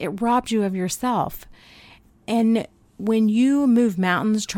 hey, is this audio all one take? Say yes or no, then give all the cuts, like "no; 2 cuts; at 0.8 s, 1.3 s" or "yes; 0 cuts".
yes; 0 cuts